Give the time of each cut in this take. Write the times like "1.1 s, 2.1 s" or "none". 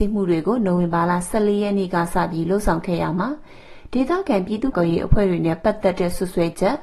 4.7 s